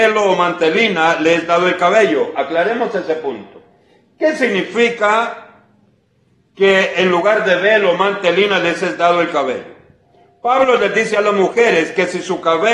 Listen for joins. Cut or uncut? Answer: uncut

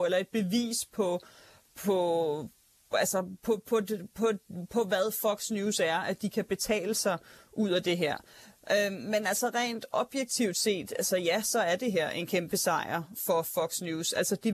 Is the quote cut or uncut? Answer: uncut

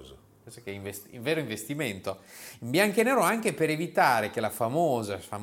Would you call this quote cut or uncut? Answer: uncut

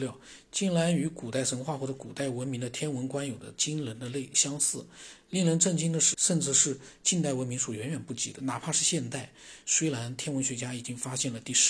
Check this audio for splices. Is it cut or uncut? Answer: cut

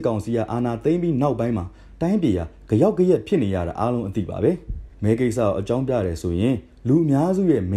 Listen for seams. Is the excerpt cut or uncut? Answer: cut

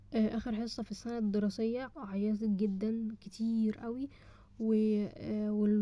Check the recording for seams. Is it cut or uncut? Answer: cut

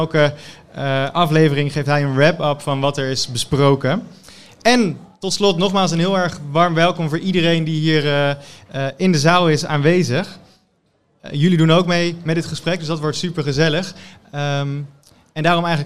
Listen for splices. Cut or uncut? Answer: uncut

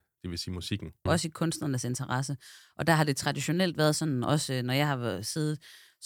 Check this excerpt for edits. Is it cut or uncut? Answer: cut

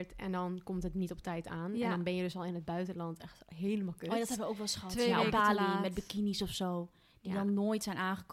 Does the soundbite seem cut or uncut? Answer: uncut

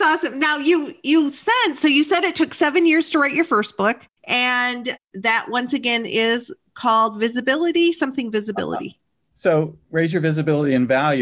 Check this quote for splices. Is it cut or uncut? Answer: cut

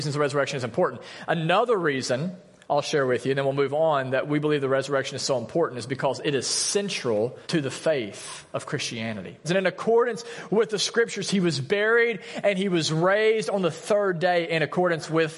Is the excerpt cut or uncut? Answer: cut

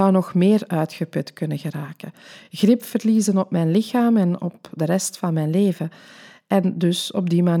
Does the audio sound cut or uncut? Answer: uncut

